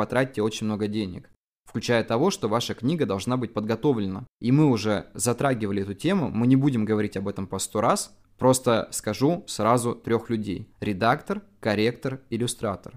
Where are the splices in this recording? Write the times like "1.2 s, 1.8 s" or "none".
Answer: none